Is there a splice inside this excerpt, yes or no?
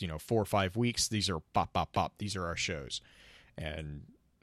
no